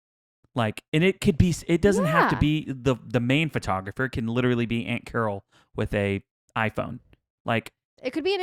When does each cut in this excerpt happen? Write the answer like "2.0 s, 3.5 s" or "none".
none